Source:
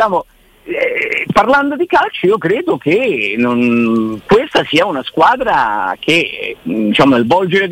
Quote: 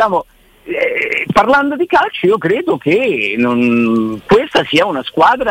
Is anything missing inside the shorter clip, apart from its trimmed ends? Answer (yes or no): no